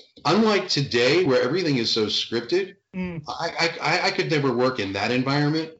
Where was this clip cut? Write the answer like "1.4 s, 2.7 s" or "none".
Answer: none